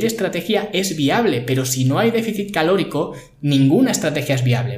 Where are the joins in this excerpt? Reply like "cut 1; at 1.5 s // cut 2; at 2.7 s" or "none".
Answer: none

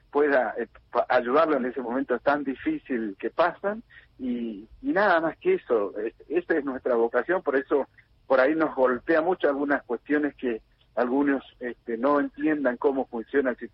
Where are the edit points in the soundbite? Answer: none

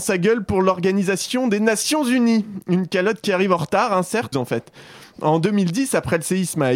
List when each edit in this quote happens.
cut 1; at 4.3 s

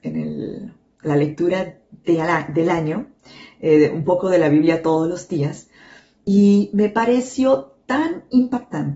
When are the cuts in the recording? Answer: none

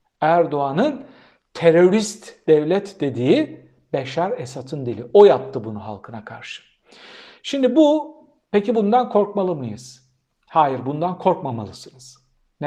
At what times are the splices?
none

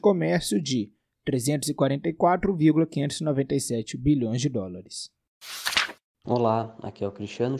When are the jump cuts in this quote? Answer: cut 1; at 6.2 s

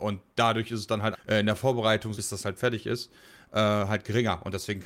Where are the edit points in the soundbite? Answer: cut 1; at 1.1 s // cut 2; at 2.1 s

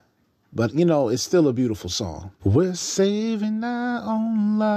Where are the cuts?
cut 1; at 2.4 s

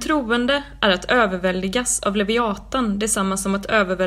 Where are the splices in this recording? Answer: none

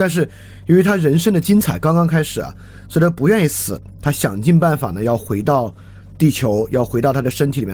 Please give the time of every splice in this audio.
none

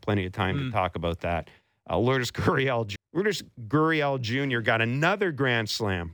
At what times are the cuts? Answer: cut 1; at 3.0 s

